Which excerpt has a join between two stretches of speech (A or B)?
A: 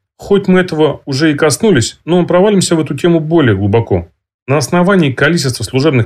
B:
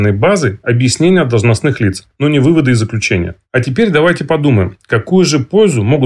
B